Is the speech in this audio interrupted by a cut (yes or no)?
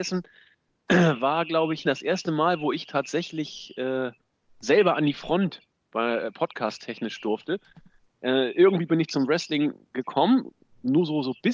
yes